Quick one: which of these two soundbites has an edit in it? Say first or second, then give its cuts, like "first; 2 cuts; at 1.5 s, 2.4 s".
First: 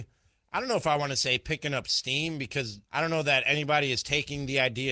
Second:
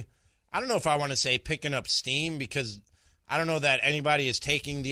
first; 1 cut; at 2.9 s